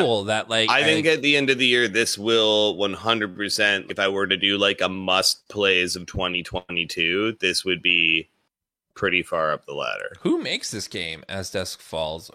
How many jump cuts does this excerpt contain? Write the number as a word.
one